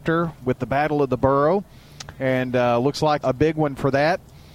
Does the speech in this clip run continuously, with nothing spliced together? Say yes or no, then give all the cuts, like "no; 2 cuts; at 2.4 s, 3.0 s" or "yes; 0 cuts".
no; 1 cut; at 3.2 s